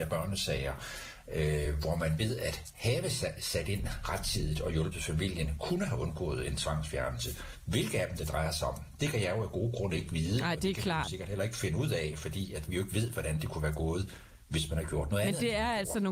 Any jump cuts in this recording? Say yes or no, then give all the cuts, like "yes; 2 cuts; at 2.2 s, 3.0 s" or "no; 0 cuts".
no; 0 cuts